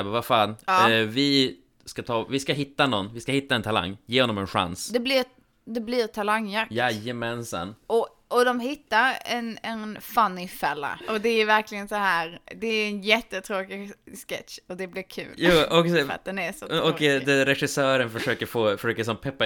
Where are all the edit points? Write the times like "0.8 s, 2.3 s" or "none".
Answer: 11.0 s